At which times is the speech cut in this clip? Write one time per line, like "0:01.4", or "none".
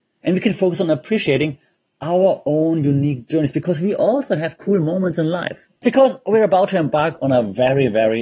0:05.8

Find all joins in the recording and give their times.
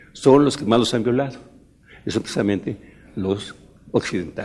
none

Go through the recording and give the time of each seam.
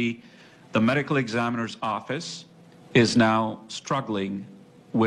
none

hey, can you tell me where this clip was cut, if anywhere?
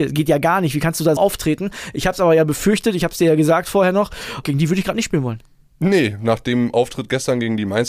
0:01.2
0:04.4

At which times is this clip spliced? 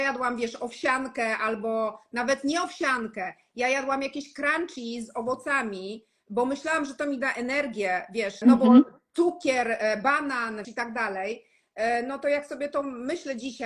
0:08.4
0:10.6

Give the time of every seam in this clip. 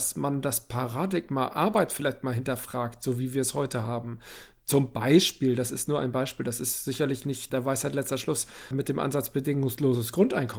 none

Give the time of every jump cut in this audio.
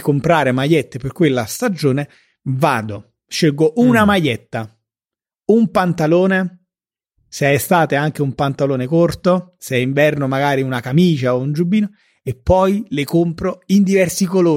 none

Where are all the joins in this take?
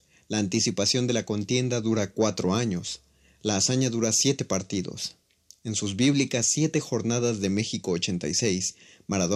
none

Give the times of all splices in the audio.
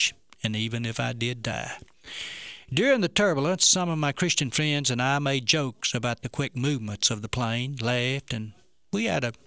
none

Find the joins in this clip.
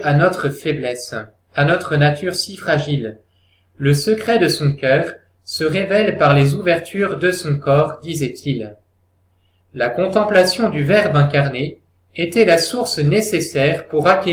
none

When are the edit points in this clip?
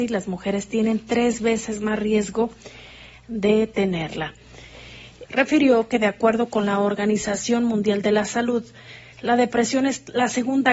0:05.3

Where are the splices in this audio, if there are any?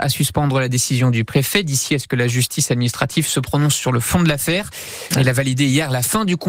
0:05.1

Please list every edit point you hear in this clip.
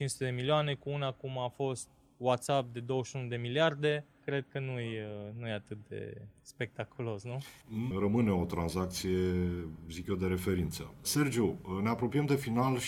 0:07.9

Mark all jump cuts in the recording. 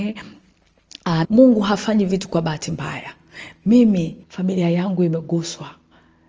0:01.2
0:04.2

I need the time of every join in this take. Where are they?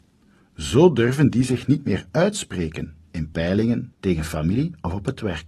0:03.9

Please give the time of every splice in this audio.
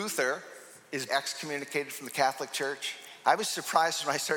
0:01.1
0:03.2

